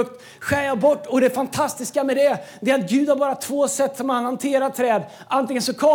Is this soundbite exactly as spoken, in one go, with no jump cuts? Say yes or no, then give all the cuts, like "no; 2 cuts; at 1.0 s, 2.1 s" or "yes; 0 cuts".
yes; 0 cuts